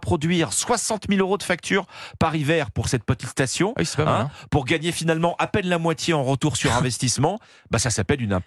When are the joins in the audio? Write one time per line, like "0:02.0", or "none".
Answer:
none